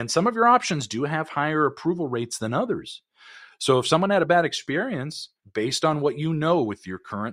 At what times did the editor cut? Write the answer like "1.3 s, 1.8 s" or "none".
5.4 s